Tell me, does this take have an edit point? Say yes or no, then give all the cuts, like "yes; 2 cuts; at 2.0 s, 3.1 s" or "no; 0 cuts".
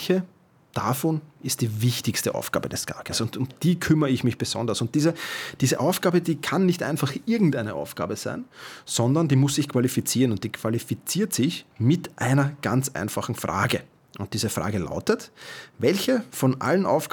no; 0 cuts